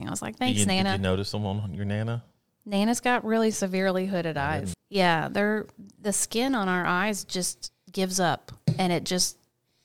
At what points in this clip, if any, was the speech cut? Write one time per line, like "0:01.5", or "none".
0:04.7

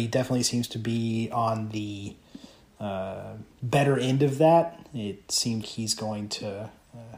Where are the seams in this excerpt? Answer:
0:03.5
0:05.6

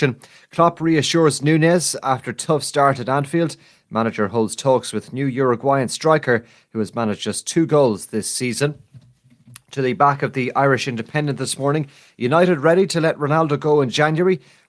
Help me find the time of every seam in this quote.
none

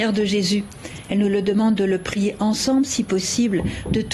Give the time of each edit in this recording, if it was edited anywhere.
0:01.1

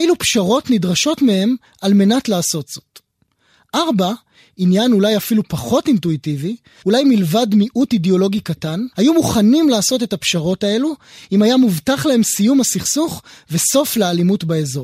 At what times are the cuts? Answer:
0:06.8
0:08.9

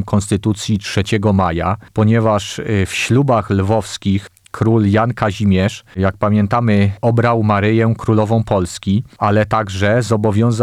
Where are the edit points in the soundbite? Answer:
none

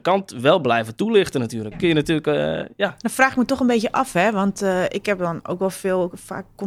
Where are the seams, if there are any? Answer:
0:01.7

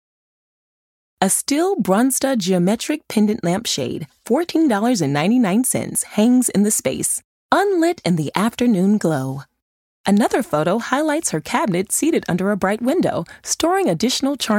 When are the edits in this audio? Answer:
0:01.1

